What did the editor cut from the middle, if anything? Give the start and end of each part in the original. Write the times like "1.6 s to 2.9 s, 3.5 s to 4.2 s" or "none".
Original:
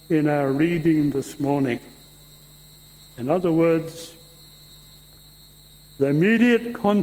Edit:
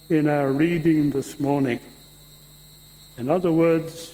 none